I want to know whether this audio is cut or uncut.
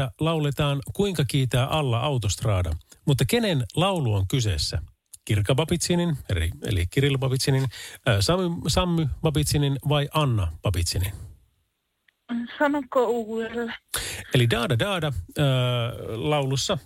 uncut